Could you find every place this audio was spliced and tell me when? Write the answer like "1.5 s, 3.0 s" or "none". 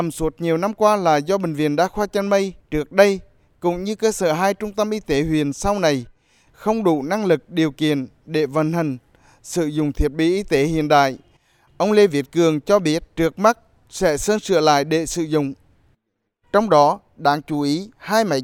13.1 s, 16.4 s